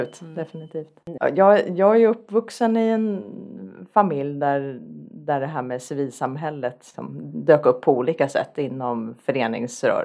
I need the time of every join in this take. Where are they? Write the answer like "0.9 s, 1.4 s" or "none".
1.2 s